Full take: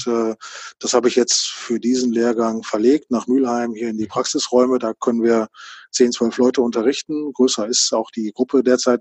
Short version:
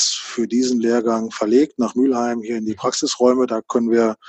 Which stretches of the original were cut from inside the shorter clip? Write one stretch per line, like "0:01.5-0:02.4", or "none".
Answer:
none